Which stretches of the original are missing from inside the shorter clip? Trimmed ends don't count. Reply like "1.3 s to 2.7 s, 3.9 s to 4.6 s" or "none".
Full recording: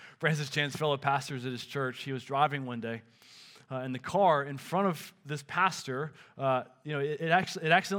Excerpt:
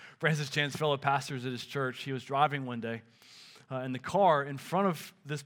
none